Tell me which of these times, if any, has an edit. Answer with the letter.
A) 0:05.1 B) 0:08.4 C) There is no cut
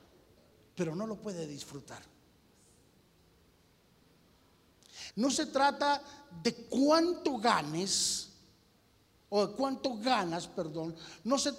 A